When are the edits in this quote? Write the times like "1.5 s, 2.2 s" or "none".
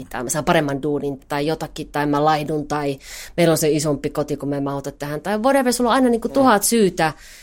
1.2 s